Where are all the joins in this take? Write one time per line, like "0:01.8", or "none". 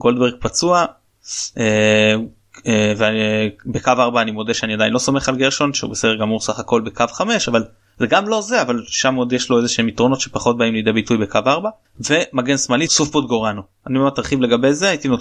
0:12.9